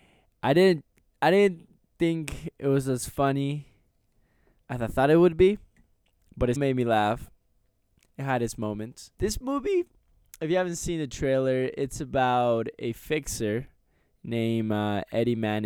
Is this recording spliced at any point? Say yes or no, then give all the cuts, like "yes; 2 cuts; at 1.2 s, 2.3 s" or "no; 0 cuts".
yes; 2 cuts; at 6.6 s, 9.1 s